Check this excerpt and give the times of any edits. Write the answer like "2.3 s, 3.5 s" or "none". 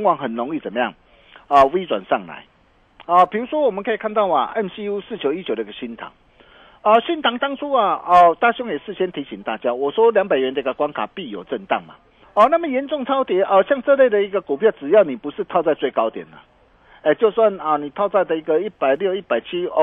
12.2 s